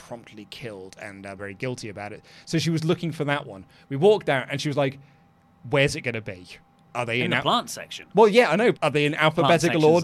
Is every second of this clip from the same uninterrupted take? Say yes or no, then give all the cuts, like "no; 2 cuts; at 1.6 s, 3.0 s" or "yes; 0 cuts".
no; 3 cuts; at 1.4 s, 6.9 s, 8.7 s